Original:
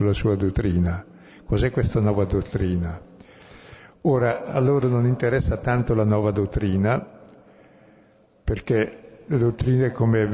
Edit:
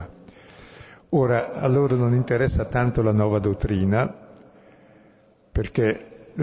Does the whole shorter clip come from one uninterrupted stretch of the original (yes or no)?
yes